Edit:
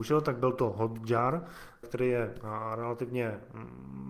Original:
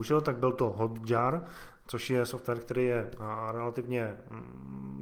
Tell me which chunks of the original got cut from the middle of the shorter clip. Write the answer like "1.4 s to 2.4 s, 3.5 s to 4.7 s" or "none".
1.8 s to 2.6 s